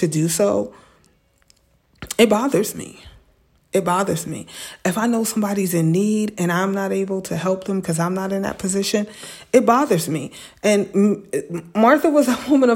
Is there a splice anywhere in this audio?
no; 0 cuts

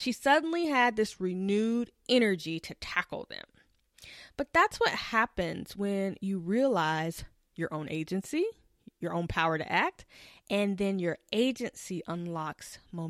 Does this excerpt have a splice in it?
no; 0 cuts

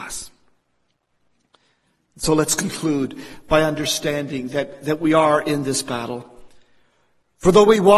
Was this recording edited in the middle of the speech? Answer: no; 0 cuts

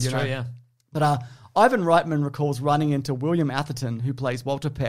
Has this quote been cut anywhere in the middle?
no; 0 cuts

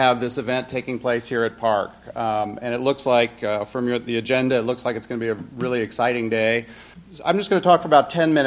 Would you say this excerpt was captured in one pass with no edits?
yes; 0 cuts

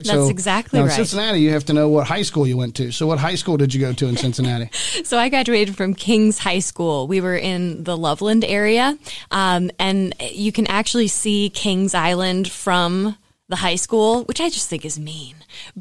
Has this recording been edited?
no; 0 cuts

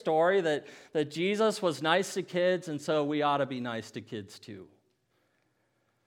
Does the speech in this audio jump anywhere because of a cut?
no; 0 cuts

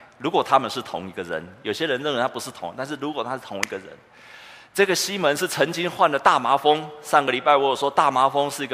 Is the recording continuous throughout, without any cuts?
yes; 0 cuts

